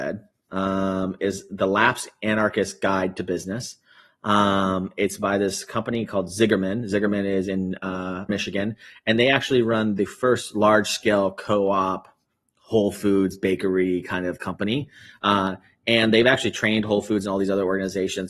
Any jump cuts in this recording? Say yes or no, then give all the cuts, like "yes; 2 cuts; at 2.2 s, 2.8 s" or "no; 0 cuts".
yes; 1 cut; at 8.3 s